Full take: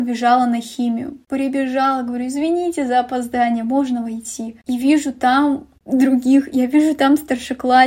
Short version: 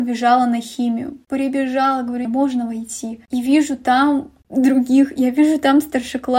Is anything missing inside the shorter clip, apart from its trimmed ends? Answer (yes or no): yes